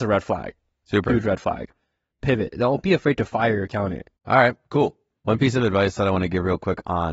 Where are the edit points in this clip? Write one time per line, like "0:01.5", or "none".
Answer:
0:02.1
0:04.2